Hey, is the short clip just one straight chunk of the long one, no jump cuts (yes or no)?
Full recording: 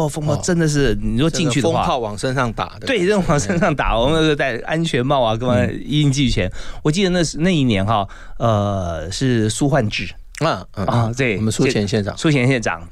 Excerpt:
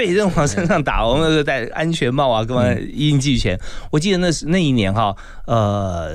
yes